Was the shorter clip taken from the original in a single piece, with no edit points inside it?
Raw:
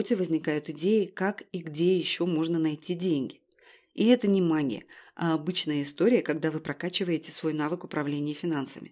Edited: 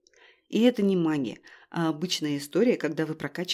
yes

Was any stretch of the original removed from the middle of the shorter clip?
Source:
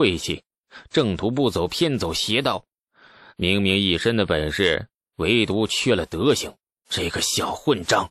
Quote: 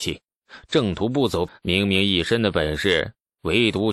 yes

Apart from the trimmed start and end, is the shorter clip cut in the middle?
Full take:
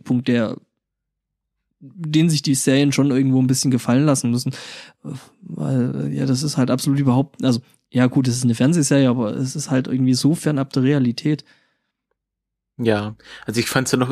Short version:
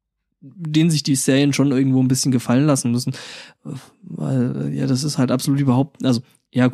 no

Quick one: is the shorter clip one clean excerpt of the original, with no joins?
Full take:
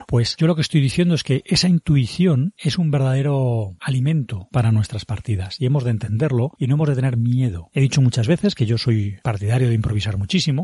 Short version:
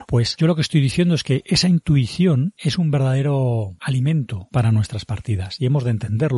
yes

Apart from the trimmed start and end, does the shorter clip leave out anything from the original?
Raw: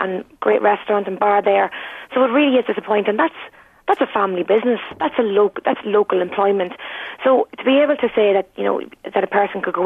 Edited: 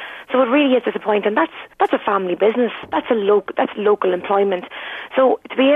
yes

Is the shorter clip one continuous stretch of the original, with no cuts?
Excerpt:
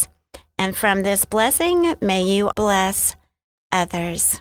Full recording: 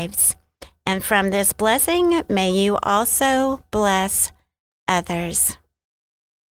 no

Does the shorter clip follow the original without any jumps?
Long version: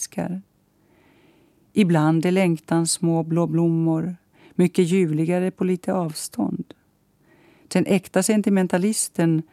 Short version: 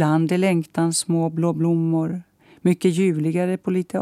yes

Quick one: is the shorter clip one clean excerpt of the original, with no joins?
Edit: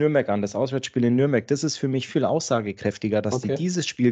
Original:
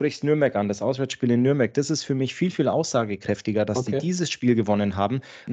no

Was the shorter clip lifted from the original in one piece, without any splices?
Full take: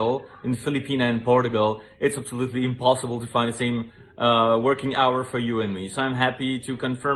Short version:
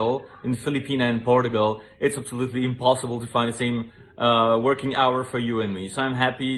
yes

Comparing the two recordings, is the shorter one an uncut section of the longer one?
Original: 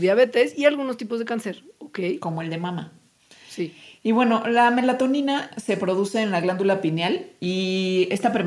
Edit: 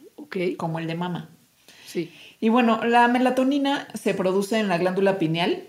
yes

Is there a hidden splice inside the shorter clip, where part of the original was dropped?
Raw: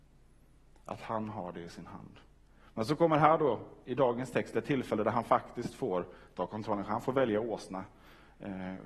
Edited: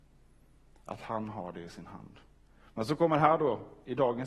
no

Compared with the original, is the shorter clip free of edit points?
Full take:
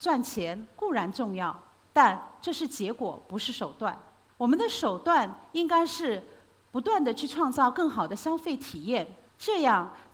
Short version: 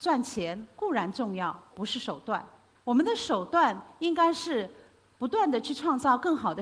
no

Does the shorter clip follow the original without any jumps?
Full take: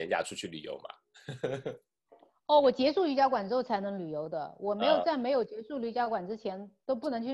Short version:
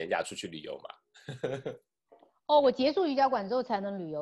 yes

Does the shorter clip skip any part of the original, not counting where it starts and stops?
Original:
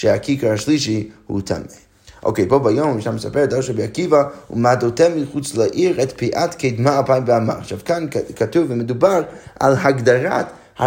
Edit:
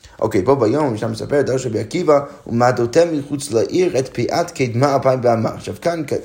no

